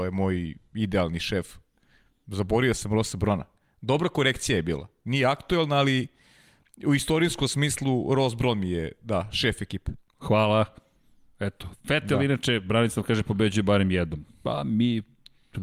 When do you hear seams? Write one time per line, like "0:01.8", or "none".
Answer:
none